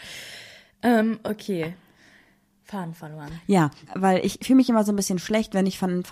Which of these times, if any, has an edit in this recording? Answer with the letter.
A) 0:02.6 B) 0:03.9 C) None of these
B